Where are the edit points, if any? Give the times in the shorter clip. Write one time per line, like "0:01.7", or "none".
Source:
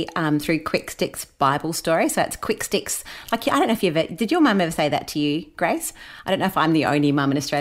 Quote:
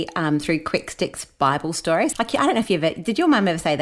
0:02.1